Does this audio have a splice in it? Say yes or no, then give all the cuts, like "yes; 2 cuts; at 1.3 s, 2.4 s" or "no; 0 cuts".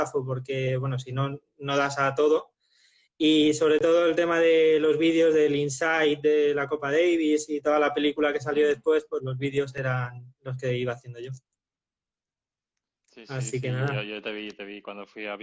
no; 0 cuts